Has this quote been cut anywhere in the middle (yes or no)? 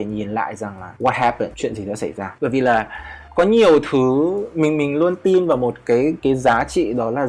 yes